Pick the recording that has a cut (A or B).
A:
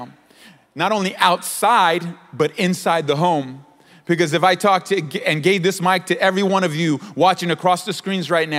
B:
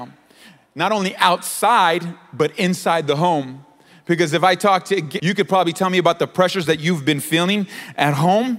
B